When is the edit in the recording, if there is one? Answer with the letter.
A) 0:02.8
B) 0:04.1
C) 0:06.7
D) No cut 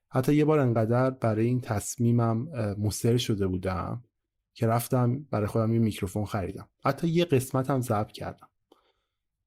C